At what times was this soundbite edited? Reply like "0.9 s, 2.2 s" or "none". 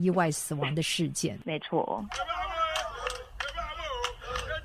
none